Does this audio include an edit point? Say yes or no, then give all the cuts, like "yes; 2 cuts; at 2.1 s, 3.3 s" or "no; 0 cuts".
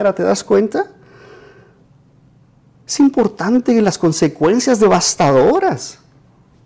no; 0 cuts